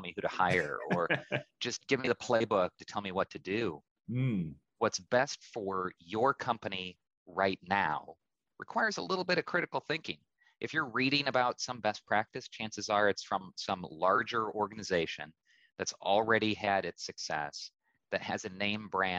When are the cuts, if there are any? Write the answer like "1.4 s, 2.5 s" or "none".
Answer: 3.9 s